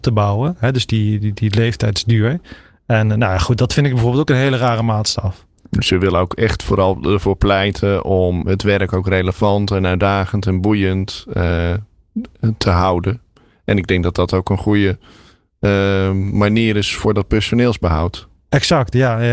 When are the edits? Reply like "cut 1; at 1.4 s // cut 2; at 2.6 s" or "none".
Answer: cut 1; at 8.4 s